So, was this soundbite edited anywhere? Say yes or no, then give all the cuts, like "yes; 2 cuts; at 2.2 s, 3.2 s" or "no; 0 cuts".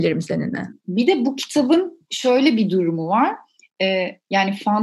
no; 0 cuts